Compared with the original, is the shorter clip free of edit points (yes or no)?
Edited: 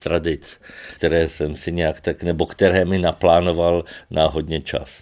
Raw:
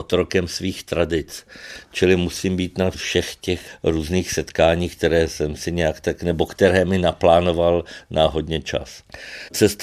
no